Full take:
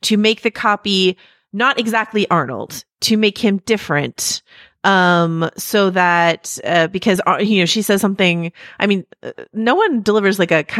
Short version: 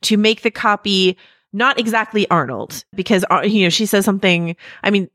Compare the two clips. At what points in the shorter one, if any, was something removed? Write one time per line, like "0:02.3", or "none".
0:02.9